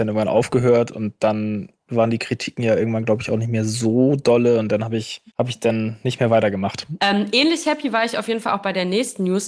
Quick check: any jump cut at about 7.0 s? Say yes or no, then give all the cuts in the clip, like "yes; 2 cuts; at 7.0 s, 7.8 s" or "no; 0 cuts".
yes; 2 cuts; at 5.3 s, 7.0 s